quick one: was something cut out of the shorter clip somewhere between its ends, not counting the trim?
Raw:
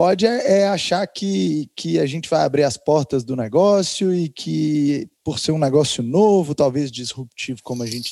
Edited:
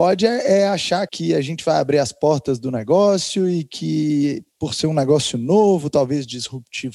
yes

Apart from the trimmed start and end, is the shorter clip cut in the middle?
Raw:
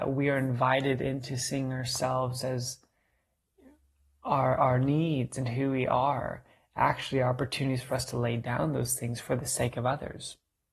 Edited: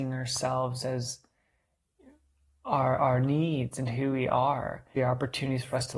yes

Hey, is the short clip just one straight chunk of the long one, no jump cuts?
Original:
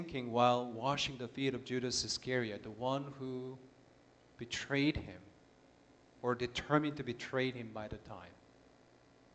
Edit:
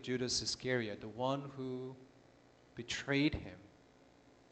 yes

